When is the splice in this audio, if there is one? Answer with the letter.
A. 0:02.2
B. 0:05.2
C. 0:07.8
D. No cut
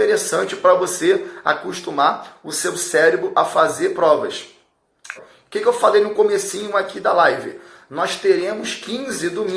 B